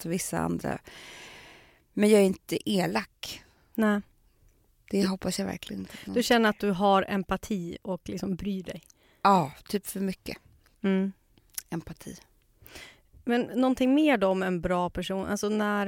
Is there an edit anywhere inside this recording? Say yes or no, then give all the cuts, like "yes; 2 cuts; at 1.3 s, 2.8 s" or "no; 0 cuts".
no; 0 cuts